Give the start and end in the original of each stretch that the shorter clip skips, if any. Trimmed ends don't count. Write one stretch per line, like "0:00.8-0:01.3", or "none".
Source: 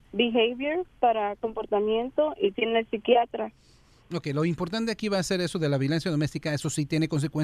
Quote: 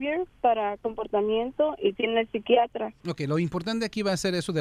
0:03.6-0:04.1